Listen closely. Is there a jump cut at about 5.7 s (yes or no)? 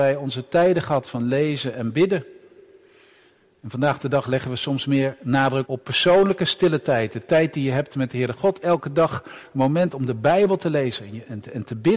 yes